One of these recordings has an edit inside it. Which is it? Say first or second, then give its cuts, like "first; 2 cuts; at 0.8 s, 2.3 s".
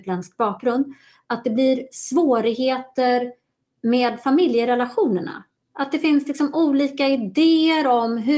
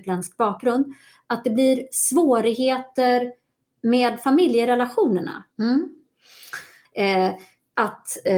second; 2 cuts; at 5.5 s, 6.8 s